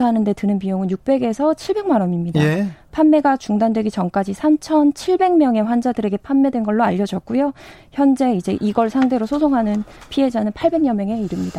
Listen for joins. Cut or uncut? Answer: uncut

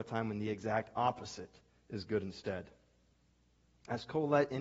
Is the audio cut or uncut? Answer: uncut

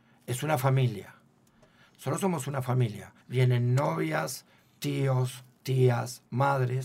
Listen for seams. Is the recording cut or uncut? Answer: cut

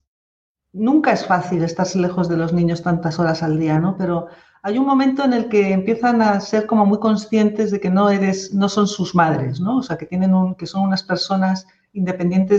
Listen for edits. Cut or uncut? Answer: uncut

